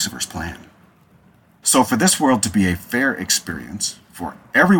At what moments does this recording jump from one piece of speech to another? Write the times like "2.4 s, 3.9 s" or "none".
1.6 s